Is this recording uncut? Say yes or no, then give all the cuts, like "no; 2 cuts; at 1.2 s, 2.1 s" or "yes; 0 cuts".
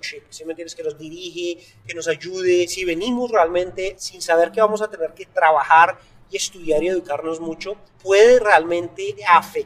yes; 0 cuts